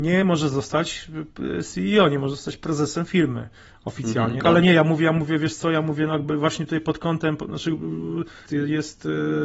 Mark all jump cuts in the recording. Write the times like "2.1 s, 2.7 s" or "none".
4.4 s, 8.5 s

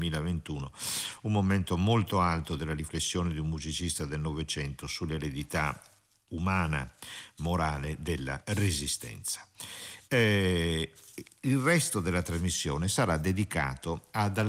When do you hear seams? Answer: 8.4 s

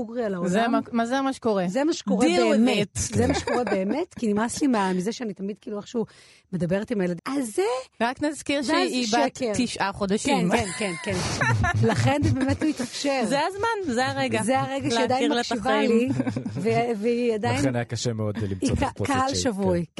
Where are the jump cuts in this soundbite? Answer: 7.2 s

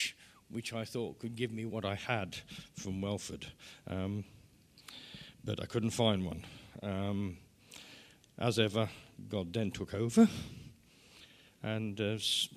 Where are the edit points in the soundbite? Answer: none

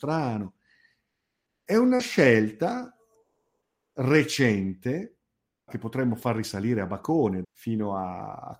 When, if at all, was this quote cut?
5.7 s, 7.4 s

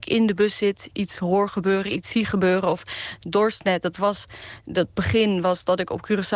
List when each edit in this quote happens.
none

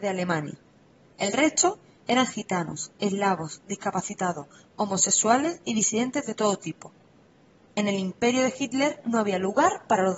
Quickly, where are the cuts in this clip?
none

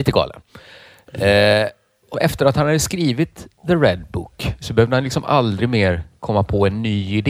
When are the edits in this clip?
2.1 s

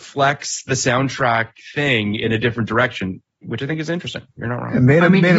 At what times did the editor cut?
none

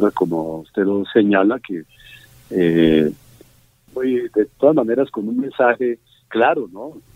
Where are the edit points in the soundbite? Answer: 3.9 s

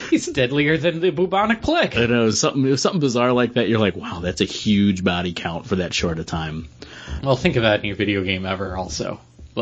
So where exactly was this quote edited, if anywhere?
none

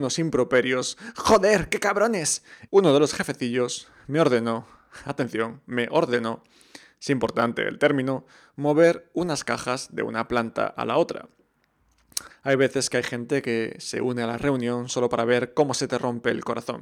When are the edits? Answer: 2.7 s, 12.3 s

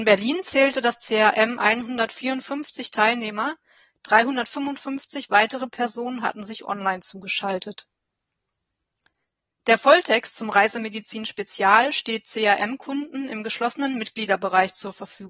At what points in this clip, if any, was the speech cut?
none

